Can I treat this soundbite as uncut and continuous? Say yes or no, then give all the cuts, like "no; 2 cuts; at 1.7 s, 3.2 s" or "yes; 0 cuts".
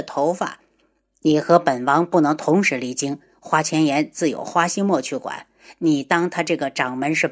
yes; 0 cuts